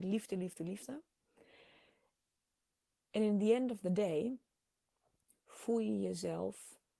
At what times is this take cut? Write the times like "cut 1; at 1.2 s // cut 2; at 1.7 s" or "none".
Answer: none

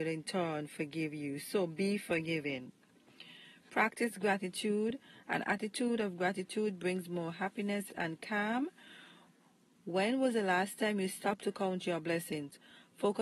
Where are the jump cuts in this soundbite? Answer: cut 1; at 7.9 s

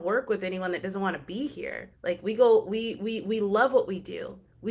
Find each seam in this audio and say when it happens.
cut 1; at 1.9 s

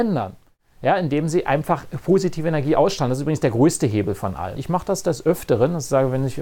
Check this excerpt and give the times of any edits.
cut 1; at 4.6 s

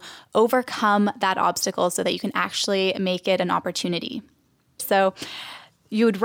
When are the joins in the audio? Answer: cut 1; at 4.8 s

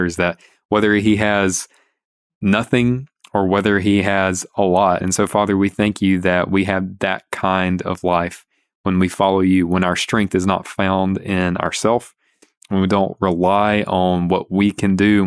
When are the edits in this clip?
cut 1; at 5.0 s

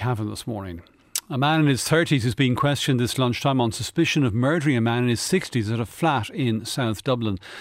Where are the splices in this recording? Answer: none

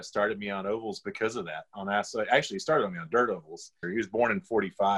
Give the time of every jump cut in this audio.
cut 1; at 3.8 s

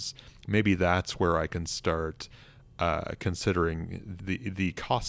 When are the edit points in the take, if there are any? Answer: cut 1; at 4.2 s

